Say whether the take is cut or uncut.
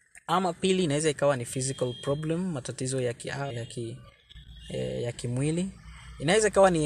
cut